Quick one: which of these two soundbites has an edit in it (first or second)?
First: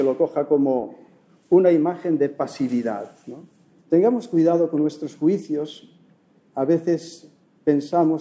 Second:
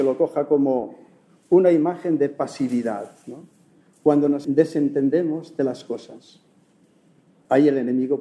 first